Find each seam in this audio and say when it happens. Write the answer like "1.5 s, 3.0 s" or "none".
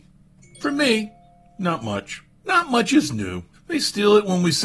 2.4 s, 3.5 s